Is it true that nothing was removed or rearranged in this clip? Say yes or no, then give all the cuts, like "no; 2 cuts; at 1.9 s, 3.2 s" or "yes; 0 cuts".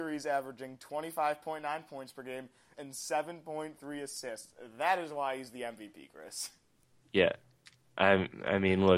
no; 1 cut; at 2.7 s